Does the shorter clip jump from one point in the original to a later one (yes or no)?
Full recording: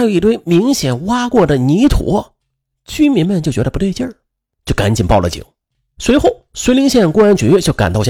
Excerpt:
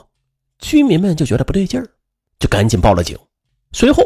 no